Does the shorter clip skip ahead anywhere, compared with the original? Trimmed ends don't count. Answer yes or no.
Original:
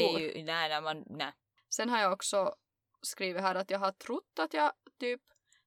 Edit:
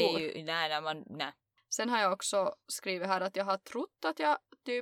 yes